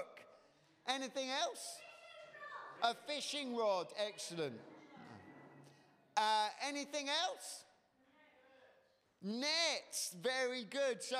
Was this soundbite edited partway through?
no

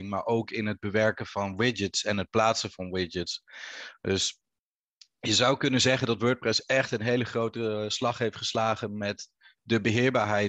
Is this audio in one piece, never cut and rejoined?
yes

